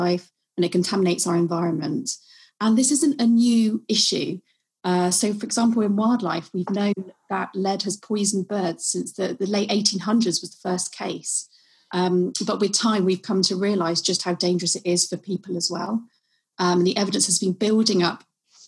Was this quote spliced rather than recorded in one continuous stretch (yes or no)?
no